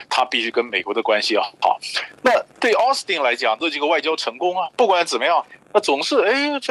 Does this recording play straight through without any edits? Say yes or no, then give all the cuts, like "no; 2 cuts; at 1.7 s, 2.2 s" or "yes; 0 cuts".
yes; 0 cuts